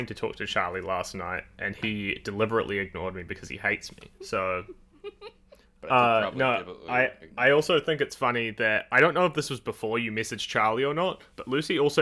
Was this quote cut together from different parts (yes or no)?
yes